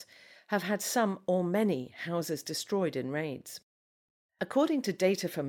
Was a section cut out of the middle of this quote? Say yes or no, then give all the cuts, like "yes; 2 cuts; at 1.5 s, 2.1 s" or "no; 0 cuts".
no; 0 cuts